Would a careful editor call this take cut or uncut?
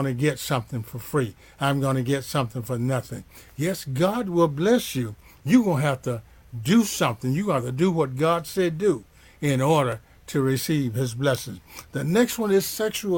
cut